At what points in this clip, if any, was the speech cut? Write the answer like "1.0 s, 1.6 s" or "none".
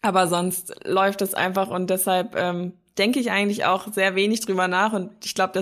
none